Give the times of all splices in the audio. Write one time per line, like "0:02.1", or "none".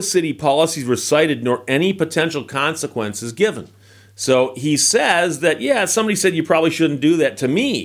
none